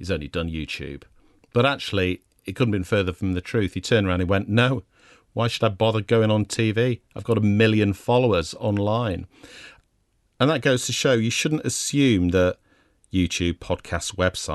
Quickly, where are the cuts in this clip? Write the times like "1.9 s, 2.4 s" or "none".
none